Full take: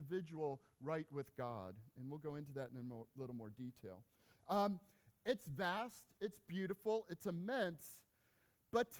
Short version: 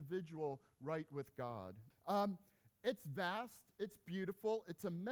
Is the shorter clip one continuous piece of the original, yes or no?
no